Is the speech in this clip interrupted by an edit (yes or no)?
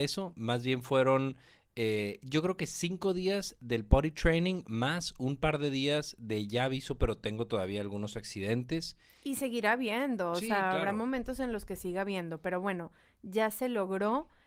no